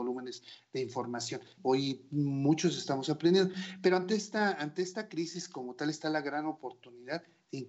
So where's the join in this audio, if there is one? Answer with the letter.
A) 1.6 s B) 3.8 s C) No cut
A